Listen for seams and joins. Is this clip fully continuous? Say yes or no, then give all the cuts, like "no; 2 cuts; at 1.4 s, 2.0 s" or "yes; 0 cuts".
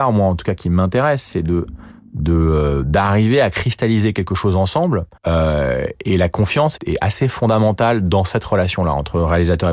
no; 2 cuts; at 5.2 s, 6.8 s